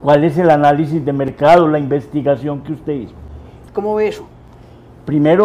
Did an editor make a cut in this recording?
yes; 1 cut; at 3.7 s

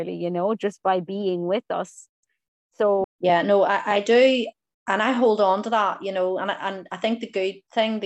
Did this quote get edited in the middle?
yes; 1 cut; at 3.0 s

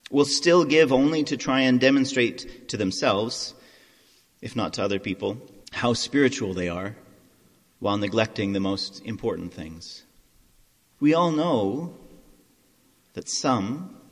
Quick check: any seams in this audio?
yes; 2 cuts; at 5.6 s, 11.0 s

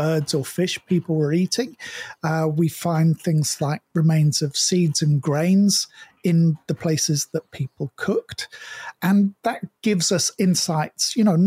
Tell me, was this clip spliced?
no; 0 cuts

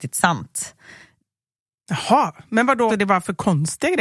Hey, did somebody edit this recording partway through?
yes; 1 cut; at 2.9 s

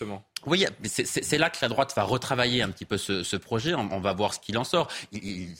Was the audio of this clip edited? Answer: no; 0 cuts

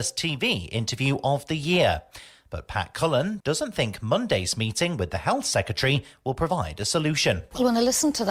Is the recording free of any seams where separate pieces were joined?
no; 1 cut; at 3.4 s

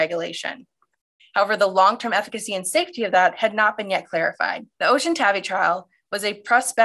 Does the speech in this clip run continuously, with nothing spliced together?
no; 2 cuts; at 1.2 s, 4.7 s

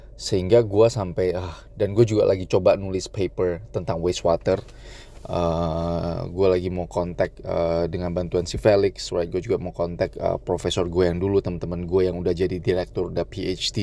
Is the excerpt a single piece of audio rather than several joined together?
yes; 0 cuts

